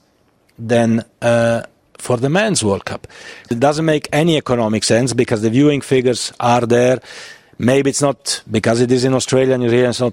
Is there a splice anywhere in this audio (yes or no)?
yes